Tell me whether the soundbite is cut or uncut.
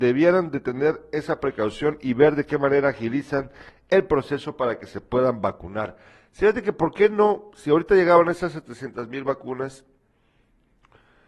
uncut